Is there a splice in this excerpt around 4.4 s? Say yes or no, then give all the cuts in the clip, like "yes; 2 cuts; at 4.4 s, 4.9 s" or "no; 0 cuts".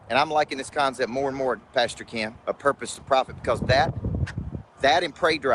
no; 1 cut; at 2.4 s